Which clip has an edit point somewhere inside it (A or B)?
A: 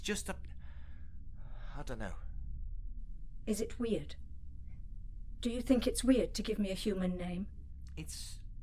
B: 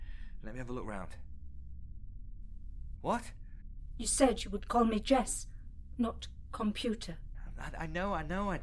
B